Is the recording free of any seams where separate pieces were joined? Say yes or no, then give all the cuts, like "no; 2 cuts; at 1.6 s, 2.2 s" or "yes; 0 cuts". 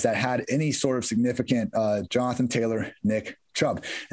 no; 1 cut; at 2.1 s